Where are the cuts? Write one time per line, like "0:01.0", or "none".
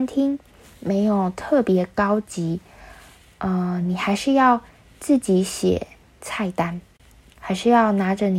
none